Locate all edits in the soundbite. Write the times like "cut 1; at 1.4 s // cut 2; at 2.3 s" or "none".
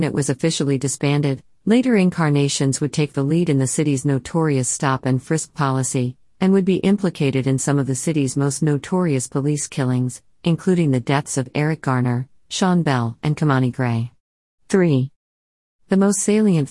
none